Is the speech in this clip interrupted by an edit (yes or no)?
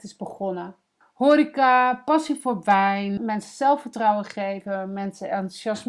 yes